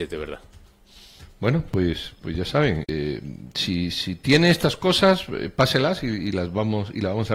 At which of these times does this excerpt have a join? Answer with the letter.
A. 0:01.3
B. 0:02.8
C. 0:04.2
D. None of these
B